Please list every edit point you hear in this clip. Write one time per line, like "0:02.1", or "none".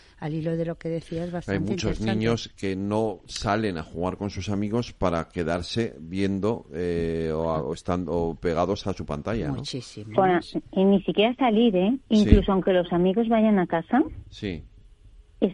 0:10.1